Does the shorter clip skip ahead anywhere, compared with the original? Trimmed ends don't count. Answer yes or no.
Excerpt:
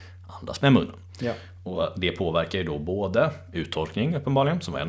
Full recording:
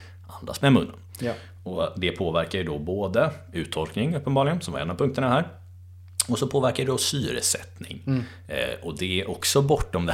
no